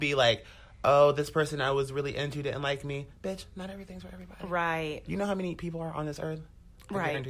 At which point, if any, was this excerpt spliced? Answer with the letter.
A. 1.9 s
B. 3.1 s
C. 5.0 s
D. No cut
D